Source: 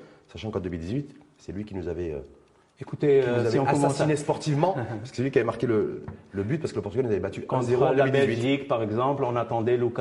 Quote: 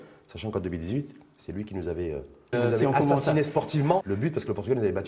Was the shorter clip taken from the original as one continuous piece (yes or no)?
no